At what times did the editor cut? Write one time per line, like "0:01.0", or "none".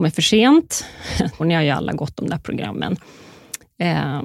0:01.4